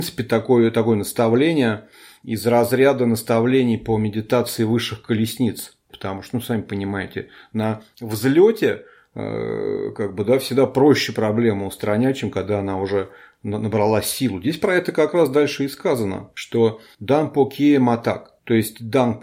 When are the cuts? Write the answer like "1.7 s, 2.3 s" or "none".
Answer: 5.9 s

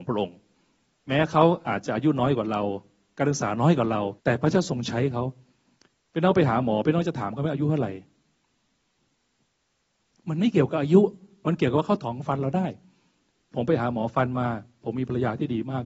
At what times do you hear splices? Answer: 4.2 s

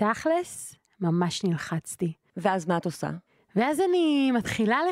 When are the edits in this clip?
2.3 s

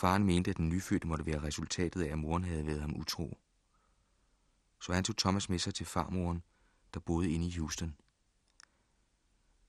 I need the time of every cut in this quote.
none

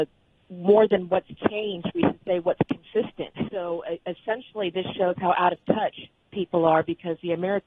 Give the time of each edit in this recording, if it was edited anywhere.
3.5 s

